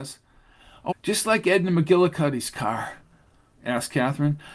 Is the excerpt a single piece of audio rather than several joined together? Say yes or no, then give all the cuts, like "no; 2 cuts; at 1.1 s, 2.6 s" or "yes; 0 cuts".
no; 2 cuts; at 0.9 s, 3.5 s